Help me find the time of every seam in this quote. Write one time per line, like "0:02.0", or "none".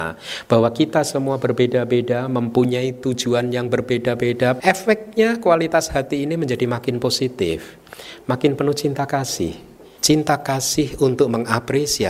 0:04.6
0:10.0